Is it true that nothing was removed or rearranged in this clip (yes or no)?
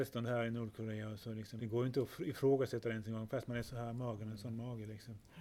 no